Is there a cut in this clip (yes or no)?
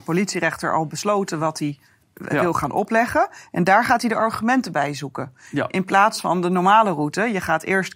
no